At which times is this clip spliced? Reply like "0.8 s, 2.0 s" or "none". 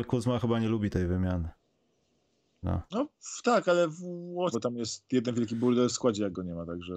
2.6 s, 4.5 s

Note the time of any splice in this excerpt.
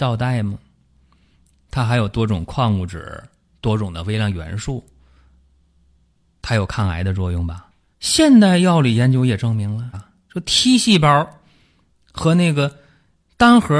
7.9 s, 9.9 s

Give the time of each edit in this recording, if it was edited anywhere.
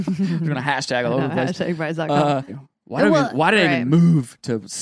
2.5 s

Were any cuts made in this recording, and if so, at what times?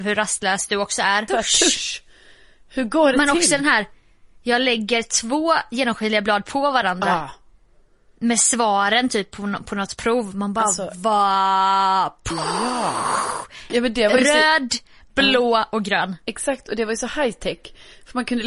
1.3 s, 13.7 s

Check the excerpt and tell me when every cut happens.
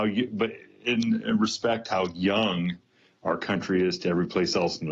none

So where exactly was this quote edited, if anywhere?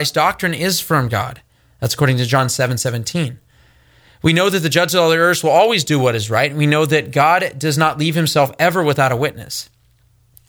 none

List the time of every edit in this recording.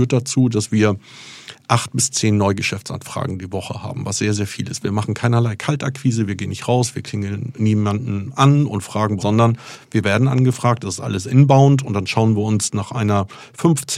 9.2 s

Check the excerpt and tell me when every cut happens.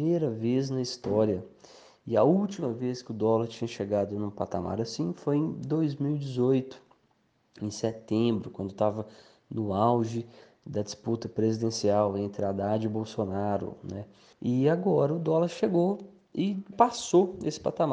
14.3 s, 16.7 s

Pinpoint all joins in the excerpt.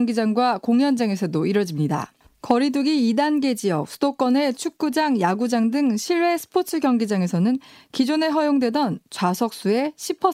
none

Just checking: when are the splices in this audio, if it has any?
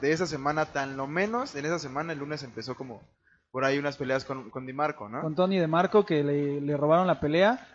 4.5 s

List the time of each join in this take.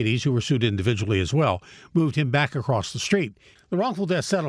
3.5 s

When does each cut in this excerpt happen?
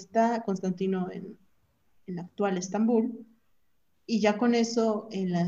none

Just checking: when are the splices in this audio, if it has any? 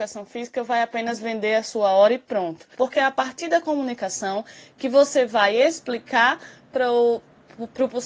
2.7 s

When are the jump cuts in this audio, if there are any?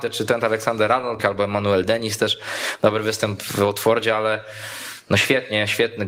1.2 s

